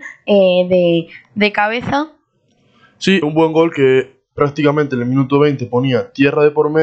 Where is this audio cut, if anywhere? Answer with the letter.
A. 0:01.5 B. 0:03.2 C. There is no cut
B